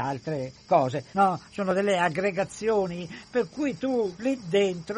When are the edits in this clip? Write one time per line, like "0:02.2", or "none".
0:01.1